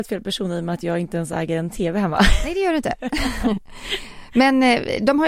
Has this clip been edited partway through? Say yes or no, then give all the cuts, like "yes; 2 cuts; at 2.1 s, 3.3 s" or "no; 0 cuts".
no; 0 cuts